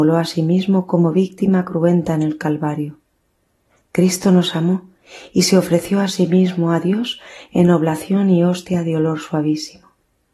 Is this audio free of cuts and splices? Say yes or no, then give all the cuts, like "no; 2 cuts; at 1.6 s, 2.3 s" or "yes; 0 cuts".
yes; 0 cuts